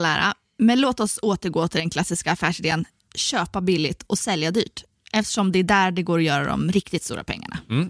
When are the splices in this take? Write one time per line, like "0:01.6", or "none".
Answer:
none